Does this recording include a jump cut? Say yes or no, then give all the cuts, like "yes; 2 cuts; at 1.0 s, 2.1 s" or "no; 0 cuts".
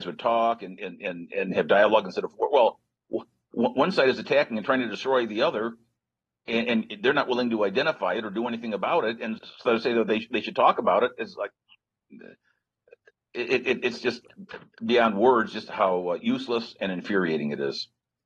yes; 1 cut; at 9.4 s